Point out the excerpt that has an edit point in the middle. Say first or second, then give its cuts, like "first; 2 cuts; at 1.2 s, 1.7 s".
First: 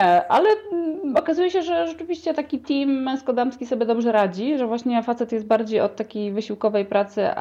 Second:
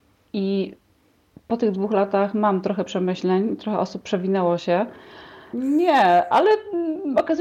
second; 1 cut; at 5.5 s